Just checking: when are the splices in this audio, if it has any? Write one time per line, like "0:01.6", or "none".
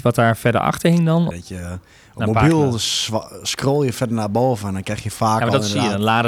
0:01.3